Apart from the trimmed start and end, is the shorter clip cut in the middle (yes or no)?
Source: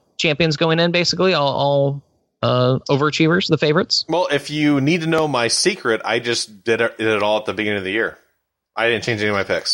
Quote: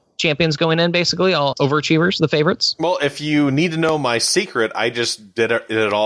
yes